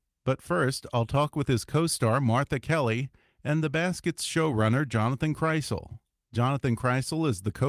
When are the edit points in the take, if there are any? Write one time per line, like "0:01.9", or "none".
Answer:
none